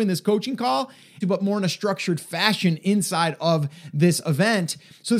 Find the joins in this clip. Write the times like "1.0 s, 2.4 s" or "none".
1.2 s